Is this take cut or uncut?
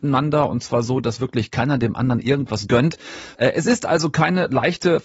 cut